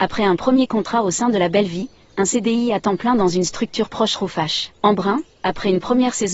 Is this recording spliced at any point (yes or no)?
yes